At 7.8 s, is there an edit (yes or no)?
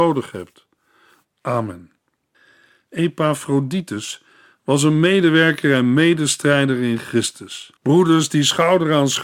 yes